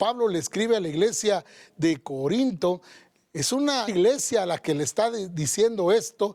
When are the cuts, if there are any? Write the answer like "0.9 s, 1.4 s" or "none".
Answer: 3.9 s